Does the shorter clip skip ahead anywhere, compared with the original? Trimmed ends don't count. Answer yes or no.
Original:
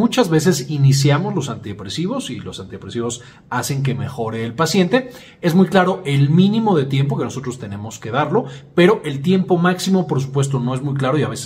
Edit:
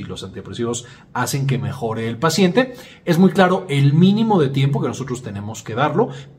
no